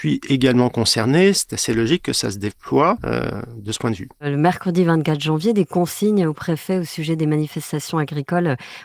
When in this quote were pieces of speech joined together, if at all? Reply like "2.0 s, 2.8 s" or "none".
none